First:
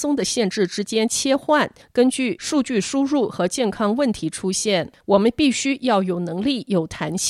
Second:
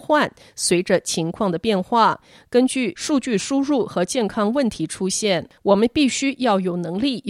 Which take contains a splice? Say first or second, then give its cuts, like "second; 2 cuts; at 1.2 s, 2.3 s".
first; 1 cut; at 1.8 s